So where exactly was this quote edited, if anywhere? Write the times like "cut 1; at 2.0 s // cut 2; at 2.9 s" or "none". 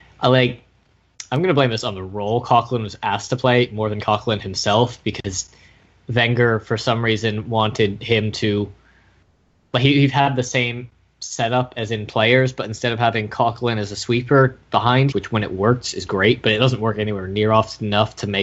cut 1; at 15.1 s

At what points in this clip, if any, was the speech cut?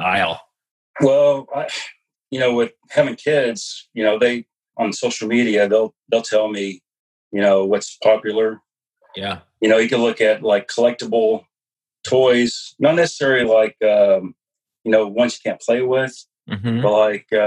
none

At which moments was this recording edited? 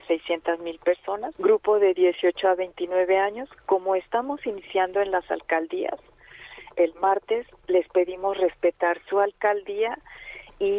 cut 1; at 1.3 s // cut 2; at 6.7 s

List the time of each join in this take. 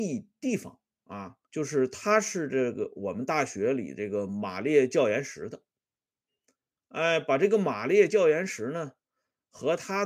cut 1; at 1.4 s

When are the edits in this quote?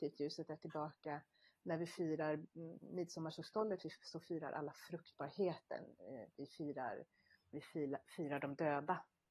cut 1; at 7.5 s

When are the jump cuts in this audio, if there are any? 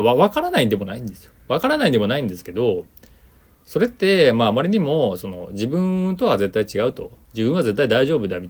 none

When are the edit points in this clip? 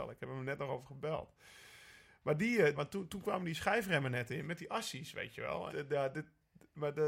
cut 1; at 2.7 s // cut 2; at 5.7 s

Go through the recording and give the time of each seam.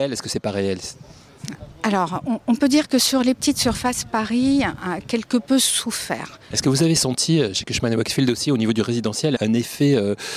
cut 1; at 6.5 s // cut 2; at 9.4 s

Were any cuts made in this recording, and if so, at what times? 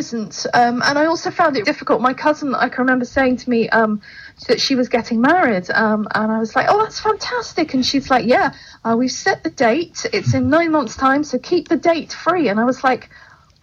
cut 1; at 1.6 s

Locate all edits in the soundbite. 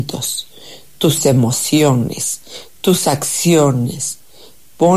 none

